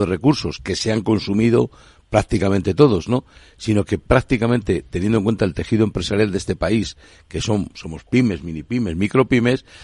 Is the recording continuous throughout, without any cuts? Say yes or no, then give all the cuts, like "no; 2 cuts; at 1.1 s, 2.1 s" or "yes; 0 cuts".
yes; 0 cuts